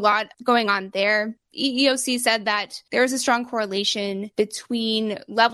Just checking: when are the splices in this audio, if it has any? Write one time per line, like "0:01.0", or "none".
none